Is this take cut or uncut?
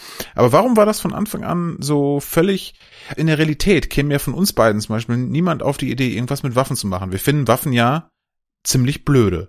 cut